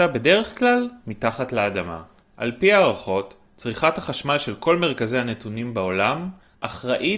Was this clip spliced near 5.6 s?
no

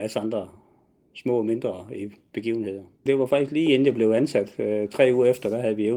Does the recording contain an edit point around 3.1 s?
yes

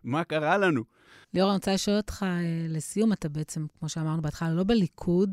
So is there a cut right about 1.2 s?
yes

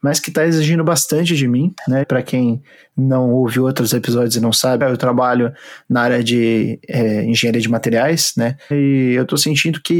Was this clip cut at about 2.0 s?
yes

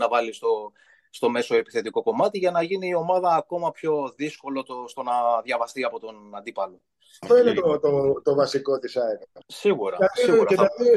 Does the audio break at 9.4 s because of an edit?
yes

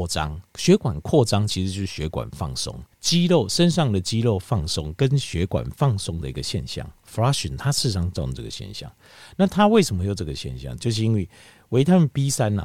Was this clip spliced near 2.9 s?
yes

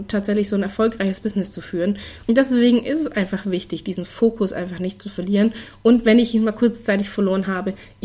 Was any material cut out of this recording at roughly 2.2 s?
yes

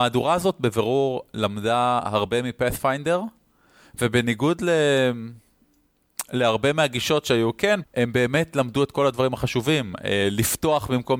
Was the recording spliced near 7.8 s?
yes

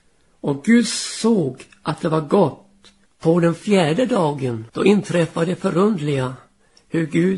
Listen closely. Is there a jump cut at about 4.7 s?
yes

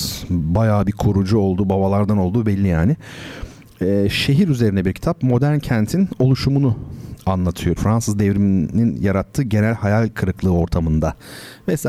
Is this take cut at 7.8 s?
yes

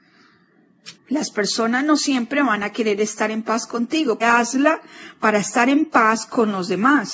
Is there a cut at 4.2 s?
yes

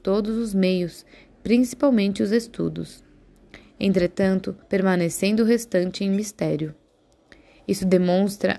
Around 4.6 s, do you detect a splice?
yes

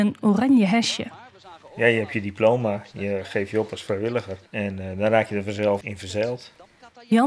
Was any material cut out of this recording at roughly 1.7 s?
no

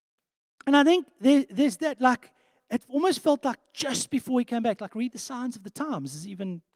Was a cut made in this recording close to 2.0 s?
no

